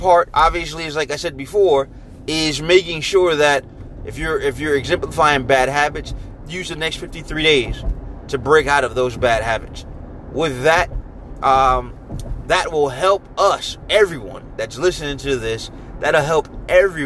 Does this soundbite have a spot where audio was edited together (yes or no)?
yes